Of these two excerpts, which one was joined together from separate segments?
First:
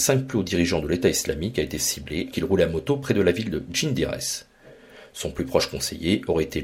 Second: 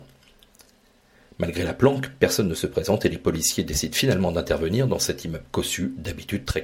first; 1 cut; at 2.3 s

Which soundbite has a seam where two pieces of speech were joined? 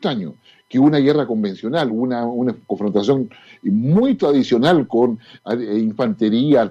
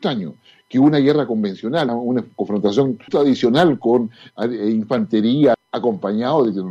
second; 3 cuts; at 1.9 s, 3.1 s, 5.5 s

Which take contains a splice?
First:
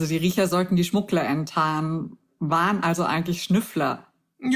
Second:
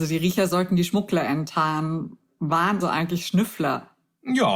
second; 1 cut; at 2.8 s

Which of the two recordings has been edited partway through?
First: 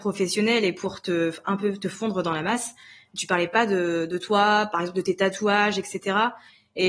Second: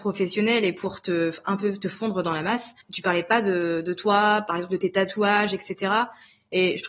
second; 1 cut; at 2.8 s

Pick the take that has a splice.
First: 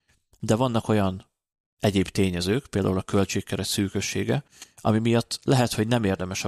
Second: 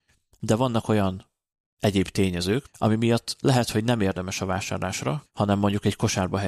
second; 2 cuts; at 2.7 s, 5.3 s

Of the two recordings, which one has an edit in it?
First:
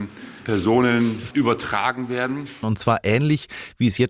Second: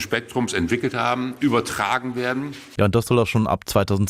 first; 2 cuts; at 1.3 s, 2.6 s

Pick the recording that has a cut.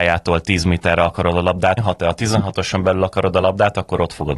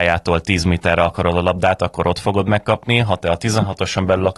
first; 1 cut; at 1.8 s

